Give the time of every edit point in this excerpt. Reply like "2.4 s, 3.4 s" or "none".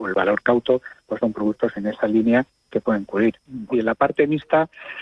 3.7 s